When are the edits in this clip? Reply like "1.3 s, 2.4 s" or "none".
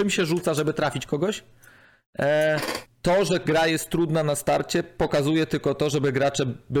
2.9 s

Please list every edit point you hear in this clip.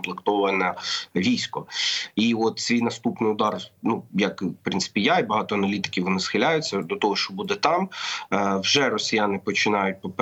4.1 s

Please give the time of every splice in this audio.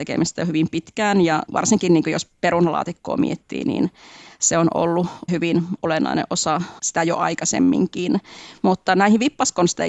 none

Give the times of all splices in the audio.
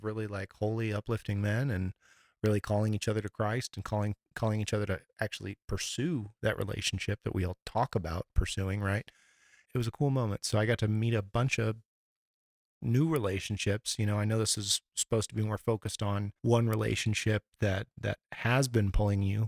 9.6 s, 16.4 s

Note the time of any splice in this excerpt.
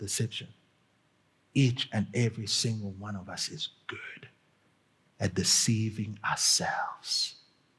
none

